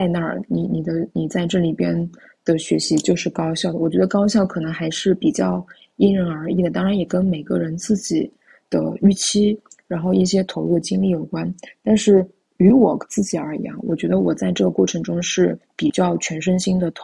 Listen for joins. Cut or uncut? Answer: uncut